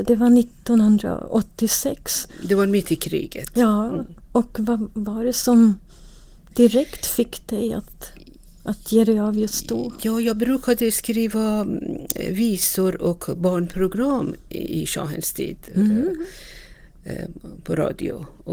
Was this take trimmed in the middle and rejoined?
no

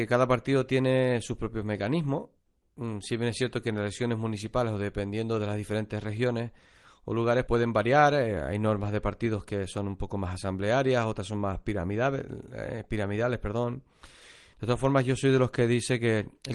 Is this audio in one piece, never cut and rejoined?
no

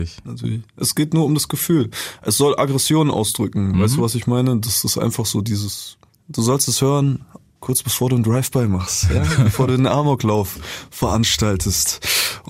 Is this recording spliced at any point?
no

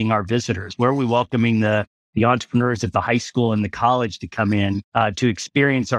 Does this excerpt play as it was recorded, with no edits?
no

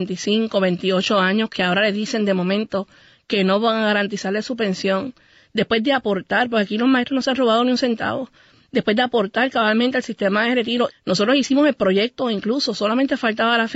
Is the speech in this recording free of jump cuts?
no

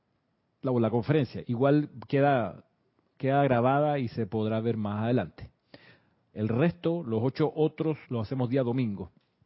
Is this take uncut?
no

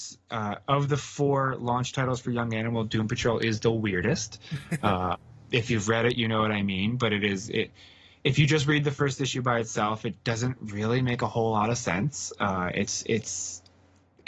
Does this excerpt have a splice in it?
no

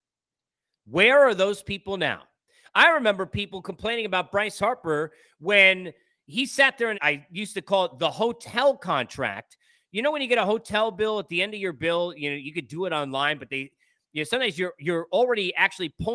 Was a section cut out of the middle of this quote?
yes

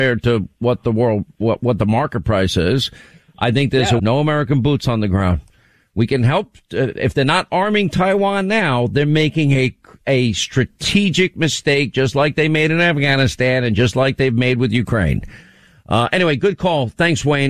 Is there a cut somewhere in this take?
yes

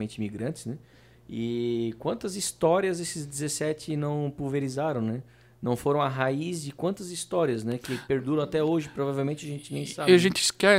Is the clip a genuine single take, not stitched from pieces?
yes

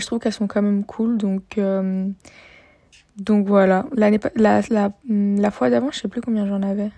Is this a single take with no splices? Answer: yes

